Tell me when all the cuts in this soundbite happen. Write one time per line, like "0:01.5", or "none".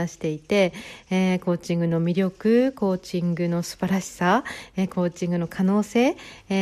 none

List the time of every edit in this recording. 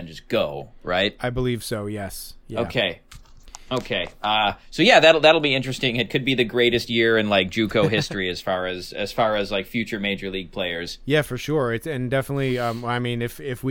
none

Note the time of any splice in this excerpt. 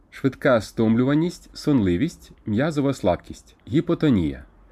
0:03.6

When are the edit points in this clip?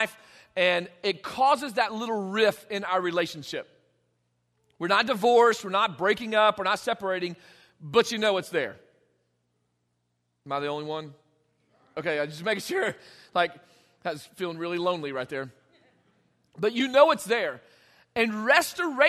none

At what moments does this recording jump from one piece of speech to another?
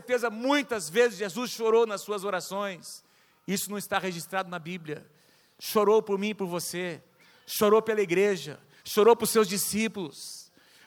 0:08.8

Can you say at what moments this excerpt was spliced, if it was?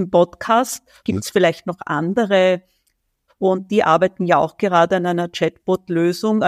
0:01.0
0:03.3

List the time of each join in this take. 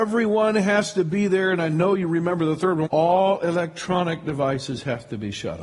0:02.9

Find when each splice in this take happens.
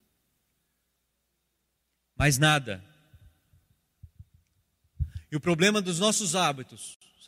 none

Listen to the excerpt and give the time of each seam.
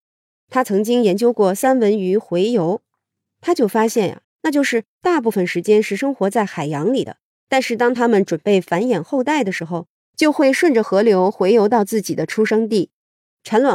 0:04.2

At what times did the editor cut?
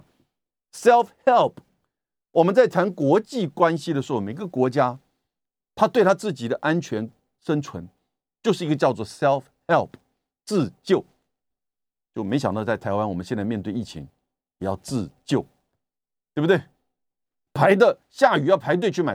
none

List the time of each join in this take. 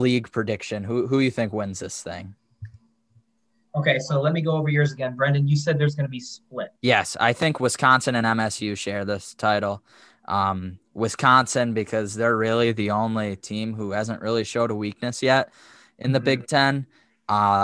0:06.8

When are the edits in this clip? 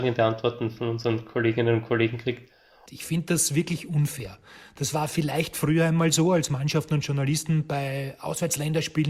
0:02.9

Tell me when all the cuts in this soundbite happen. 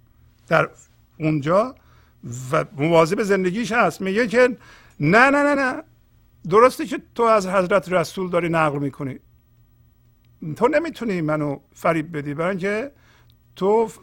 0:05.6
0:11.7

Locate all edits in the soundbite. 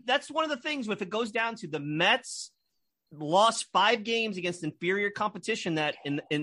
none

